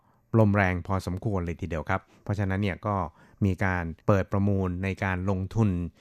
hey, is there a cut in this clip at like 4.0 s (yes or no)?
yes